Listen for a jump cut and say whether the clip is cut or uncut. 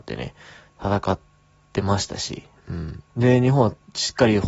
cut